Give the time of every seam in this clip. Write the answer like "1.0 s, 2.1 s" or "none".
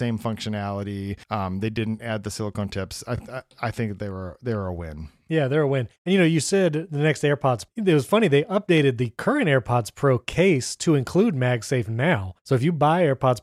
none